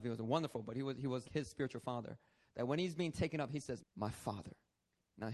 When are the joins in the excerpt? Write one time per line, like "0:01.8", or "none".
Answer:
0:01.2
0:03.8